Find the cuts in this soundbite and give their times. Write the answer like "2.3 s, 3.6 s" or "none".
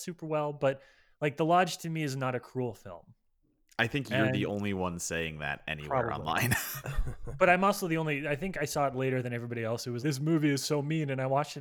10.0 s